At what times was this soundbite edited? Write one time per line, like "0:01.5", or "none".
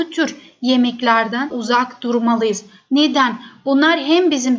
none